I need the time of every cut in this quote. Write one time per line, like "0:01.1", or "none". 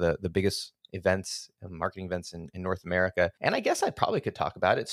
0:03.4